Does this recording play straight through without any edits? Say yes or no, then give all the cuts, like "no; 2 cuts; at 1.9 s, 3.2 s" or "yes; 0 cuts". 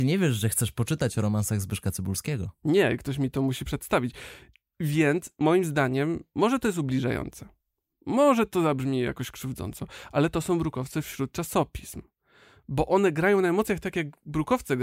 yes; 0 cuts